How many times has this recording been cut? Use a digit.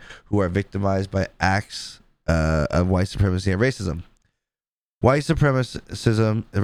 0